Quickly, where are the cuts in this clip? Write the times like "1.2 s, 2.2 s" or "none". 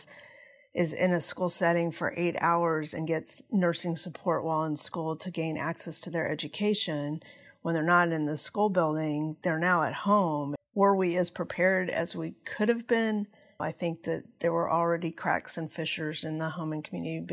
10.6 s, 13.6 s